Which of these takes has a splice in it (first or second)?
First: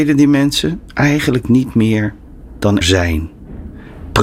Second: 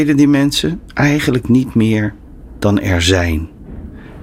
first